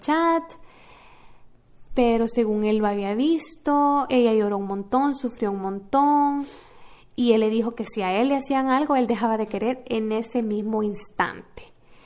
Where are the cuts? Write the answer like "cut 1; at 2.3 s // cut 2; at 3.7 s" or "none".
cut 1; at 4.1 s